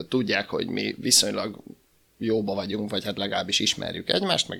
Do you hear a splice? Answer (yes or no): no